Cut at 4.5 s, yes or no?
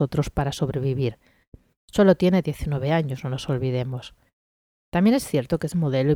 no